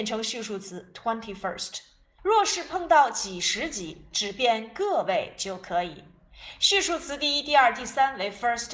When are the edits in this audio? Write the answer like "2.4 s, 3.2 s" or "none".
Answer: 2.2 s